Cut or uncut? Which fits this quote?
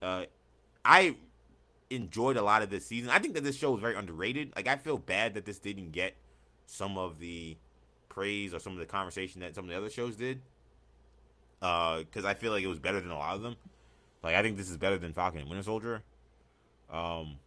uncut